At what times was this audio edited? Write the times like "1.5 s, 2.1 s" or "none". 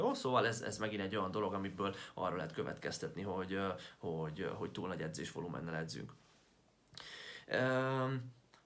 none